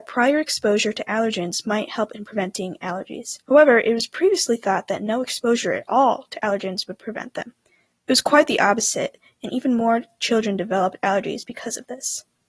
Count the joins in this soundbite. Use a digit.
1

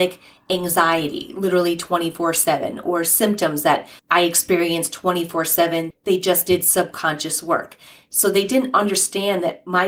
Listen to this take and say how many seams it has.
2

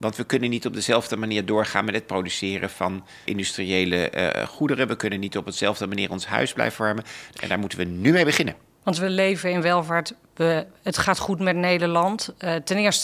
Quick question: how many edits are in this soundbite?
2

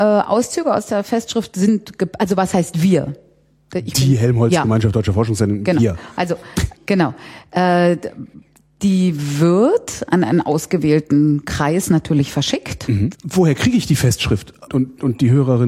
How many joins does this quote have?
3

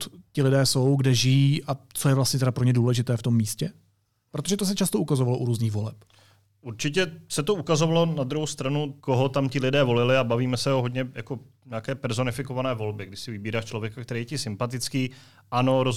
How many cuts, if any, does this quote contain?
1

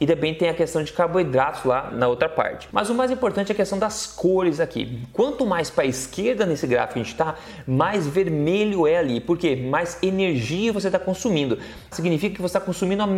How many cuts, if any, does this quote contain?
2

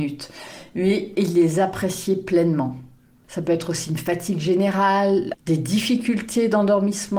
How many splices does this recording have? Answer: 2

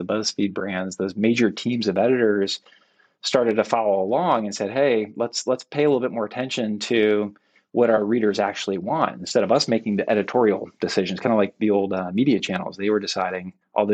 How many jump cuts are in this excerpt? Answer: 0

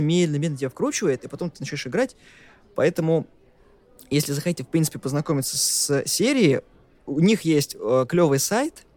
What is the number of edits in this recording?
0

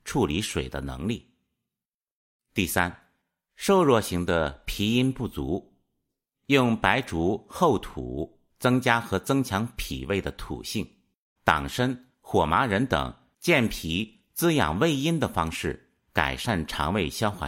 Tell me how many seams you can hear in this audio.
1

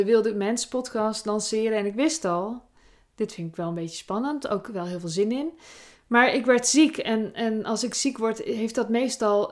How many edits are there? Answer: 0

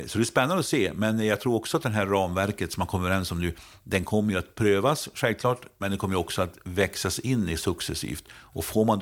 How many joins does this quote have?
0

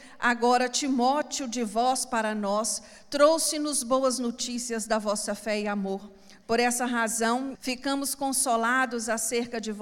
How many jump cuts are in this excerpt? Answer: 2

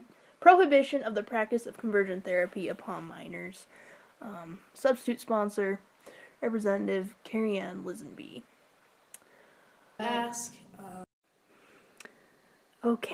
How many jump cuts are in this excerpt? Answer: 2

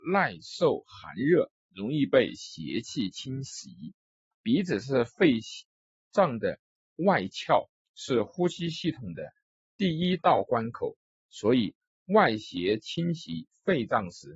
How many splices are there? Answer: 1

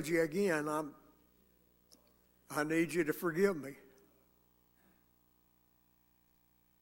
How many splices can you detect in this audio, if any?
0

